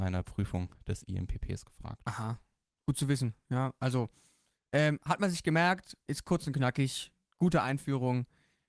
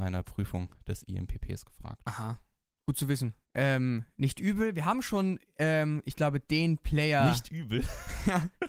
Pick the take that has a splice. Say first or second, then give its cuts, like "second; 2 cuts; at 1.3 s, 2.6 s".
second; 1 cut; at 3.4 s